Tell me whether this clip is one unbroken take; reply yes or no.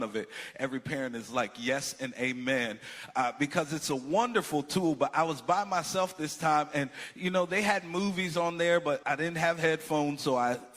no